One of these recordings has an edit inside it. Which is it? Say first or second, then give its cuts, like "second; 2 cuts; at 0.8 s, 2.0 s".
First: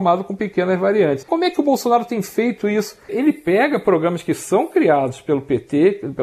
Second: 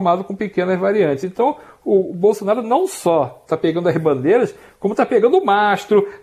first; 2 cuts; at 1.2 s, 3.1 s